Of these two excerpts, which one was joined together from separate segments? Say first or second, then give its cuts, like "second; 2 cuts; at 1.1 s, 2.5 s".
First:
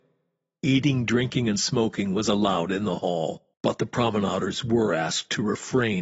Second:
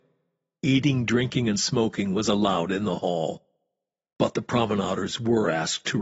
first; 1 cut; at 3.5 s